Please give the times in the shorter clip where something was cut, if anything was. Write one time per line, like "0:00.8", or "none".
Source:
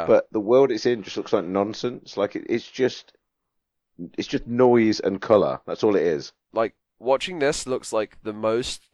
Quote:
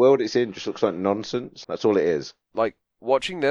0:01.6